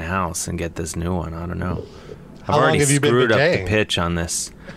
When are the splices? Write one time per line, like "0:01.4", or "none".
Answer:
none